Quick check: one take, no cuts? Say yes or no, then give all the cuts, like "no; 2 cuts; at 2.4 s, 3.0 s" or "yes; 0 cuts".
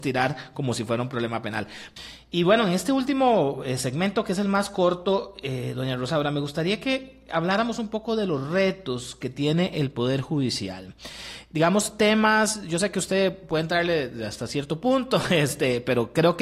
yes; 0 cuts